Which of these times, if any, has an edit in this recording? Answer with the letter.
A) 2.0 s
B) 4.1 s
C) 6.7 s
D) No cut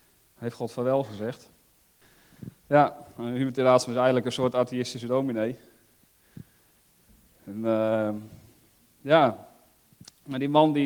A